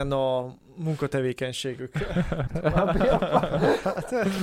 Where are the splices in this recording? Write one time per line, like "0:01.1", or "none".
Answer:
0:02.5